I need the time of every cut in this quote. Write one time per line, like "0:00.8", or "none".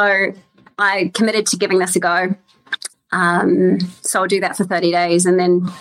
0:02.9